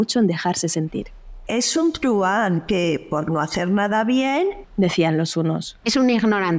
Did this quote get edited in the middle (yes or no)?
yes